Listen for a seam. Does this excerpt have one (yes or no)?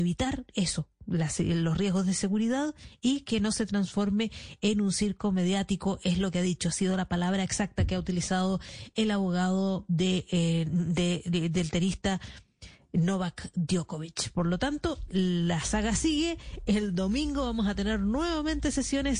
no